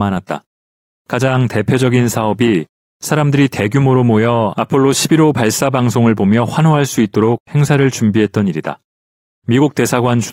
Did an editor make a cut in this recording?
yes; 1 cut; at 1.0 s

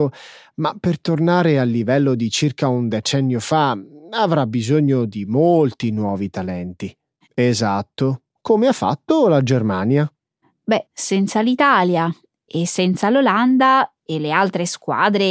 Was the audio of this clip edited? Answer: yes; 2 cuts; at 7.3 s, 10.9 s

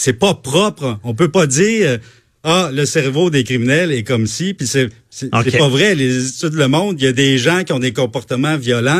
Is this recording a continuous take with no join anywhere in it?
yes; 0 cuts

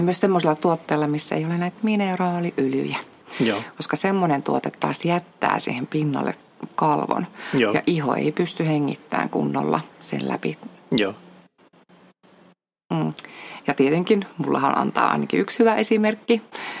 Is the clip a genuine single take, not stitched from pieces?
no; 1 cut; at 13.6 s

